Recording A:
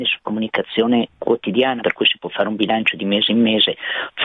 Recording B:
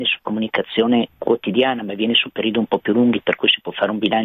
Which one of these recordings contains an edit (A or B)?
A